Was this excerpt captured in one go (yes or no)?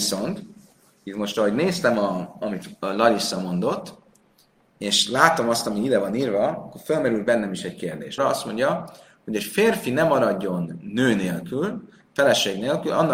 no